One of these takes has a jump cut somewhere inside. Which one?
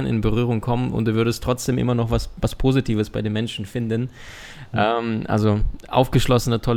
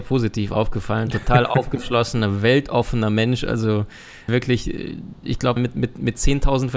second; 2 cuts; at 4.3 s, 5.6 s

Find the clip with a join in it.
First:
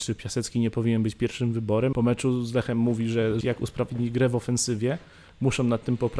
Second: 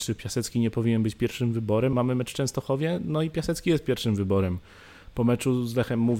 first; 2 cuts; at 1.9 s, 3.4 s

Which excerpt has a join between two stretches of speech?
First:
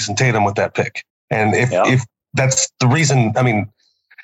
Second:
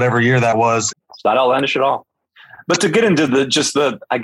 second; 1 cut; at 0.9 s

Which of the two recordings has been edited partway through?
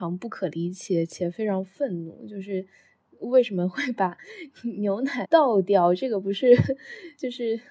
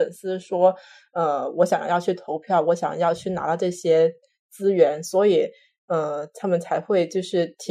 first; 1 cut; at 5.2 s

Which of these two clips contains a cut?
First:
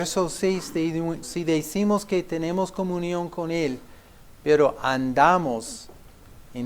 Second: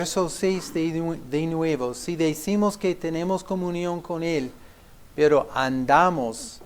first; 1 cut; at 1.2 s

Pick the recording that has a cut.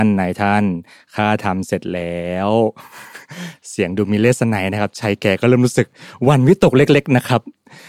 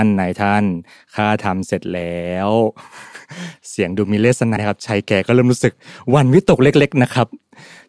second; 1 cut; at 4.6 s

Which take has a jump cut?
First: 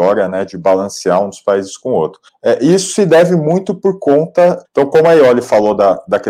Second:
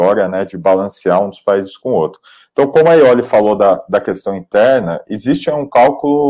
first; 2 cuts; at 2.3 s, 4.6 s

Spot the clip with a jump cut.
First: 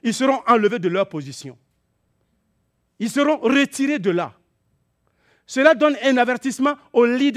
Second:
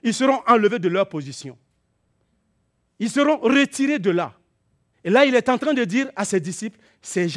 second; 1 cut; at 4.9 s

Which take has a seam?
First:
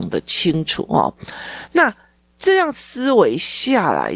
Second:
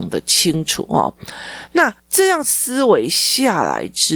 second; 1 cut; at 2.0 s

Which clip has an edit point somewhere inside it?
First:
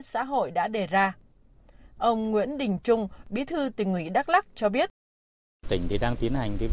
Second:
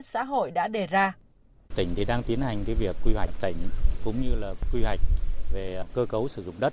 second; 1 cut; at 1.6 s

